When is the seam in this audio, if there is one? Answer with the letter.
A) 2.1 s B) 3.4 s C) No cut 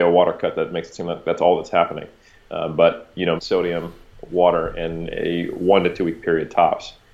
B